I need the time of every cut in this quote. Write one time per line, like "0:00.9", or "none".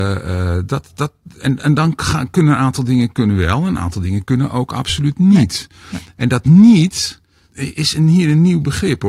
0:07.5

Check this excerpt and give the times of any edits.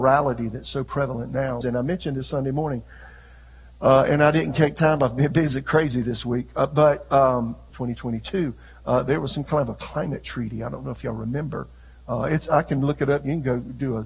0:01.6
0:07.7

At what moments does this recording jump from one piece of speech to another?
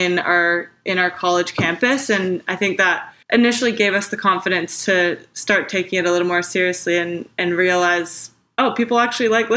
0:03.2

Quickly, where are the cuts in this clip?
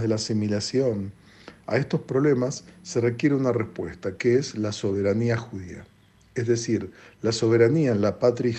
none

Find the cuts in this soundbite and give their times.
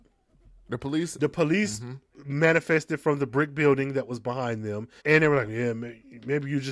0:05.0

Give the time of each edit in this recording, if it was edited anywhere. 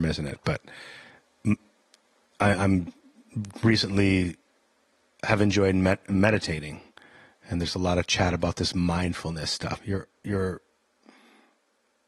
0:09.8

